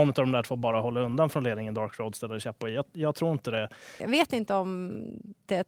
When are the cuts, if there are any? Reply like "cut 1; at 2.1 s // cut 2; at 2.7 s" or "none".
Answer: cut 1; at 4.0 s